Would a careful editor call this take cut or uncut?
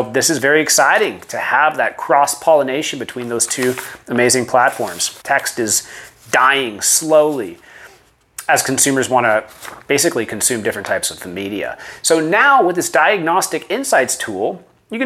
cut